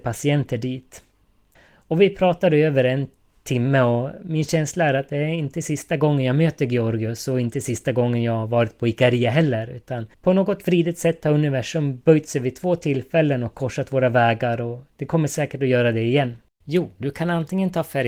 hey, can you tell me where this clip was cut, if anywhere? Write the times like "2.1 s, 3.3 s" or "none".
1.6 s, 10.1 s, 16.6 s